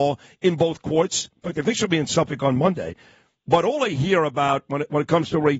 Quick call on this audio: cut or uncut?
uncut